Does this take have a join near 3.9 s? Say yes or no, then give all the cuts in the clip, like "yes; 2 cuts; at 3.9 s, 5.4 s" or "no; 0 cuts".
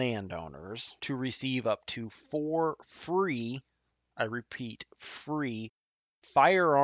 no; 0 cuts